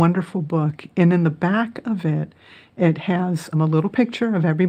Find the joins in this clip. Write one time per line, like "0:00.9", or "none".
0:03.5